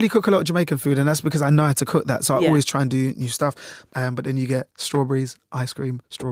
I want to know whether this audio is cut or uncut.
cut